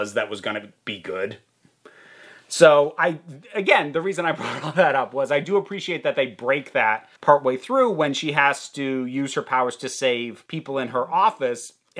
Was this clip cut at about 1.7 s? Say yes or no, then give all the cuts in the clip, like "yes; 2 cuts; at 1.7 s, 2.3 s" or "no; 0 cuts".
no; 2 cuts; at 7.2 s, 10.5 s